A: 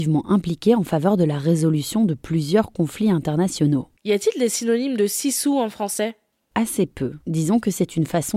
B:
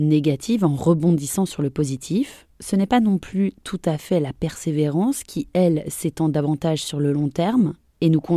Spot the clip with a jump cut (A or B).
A